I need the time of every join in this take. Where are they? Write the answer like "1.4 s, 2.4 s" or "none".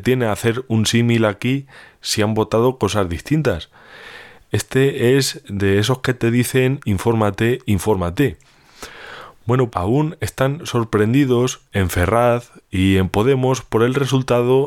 9.7 s, 11.7 s